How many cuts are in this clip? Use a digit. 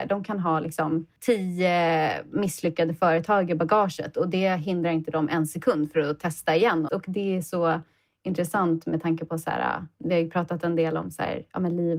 1